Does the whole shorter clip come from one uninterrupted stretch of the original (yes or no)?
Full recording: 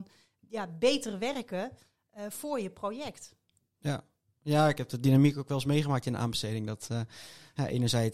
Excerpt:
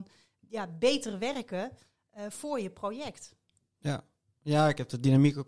yes